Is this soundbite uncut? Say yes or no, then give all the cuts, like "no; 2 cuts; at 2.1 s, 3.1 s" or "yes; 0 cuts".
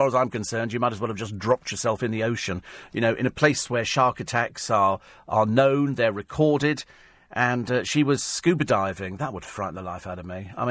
yes; 0 cuts